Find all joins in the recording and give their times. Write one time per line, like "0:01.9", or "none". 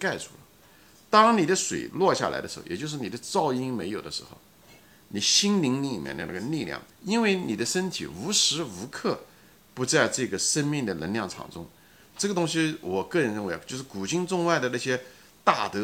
0:06.9
0:12.1